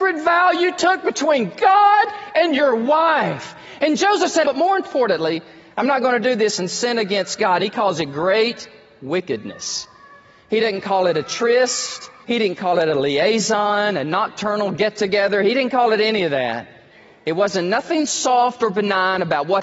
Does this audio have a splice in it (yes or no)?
yes